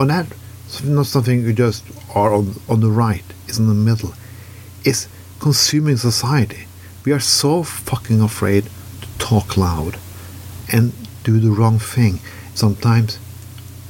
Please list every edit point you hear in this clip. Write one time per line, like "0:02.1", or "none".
0:02.7
0:12.5